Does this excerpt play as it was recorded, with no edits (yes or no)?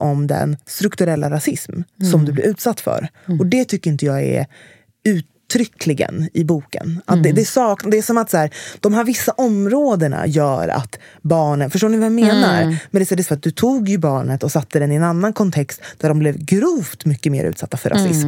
no